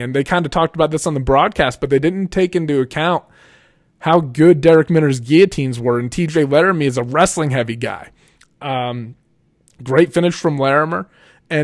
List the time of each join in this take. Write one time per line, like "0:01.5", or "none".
none